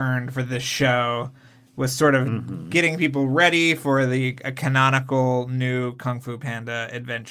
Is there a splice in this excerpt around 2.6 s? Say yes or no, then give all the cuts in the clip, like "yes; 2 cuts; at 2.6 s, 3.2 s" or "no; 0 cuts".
no; 0 cuts